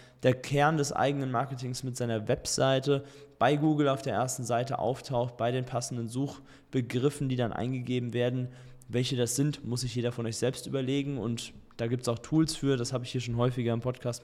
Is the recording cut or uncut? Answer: uncut